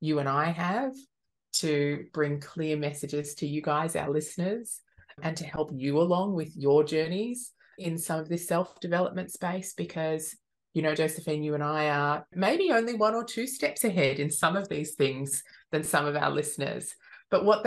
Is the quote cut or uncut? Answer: uncut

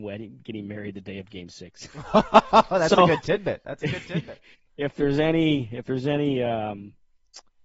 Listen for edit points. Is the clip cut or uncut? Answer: uncut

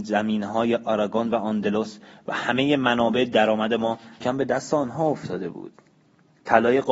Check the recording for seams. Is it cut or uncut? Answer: cut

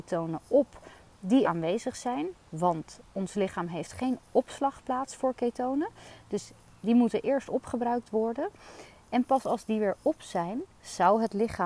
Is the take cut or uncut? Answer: cut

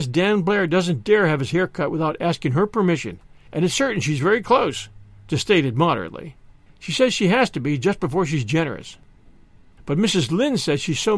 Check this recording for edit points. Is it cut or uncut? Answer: uncut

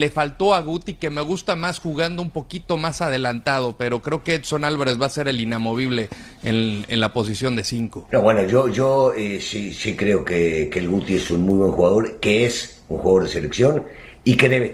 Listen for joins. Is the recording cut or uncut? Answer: cut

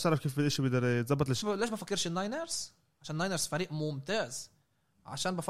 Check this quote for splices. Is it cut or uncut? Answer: cut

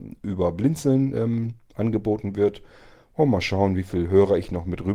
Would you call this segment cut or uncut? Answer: uncut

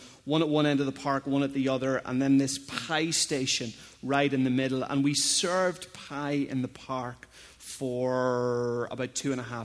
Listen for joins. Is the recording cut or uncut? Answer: uncut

